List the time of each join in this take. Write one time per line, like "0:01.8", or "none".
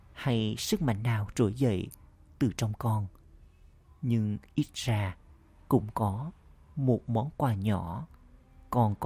none

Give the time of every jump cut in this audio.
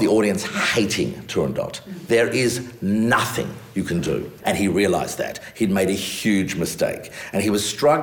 0:04.4
0:06.2

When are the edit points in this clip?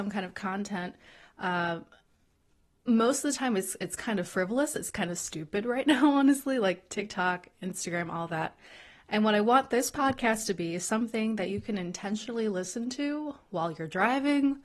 none

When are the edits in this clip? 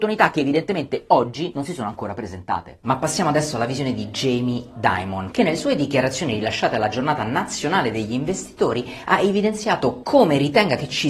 0:05.3

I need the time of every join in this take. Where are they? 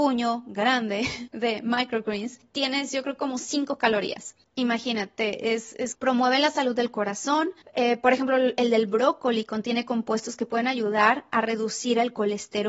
0:05.9

